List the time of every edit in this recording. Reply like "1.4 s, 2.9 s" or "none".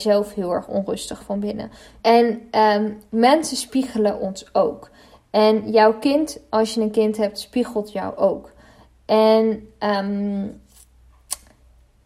2.0 s